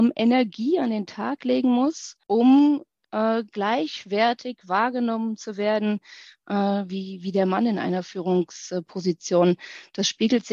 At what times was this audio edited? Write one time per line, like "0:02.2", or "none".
0:02.2